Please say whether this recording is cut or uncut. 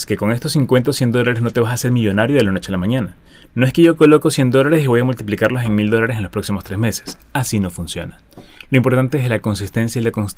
uncut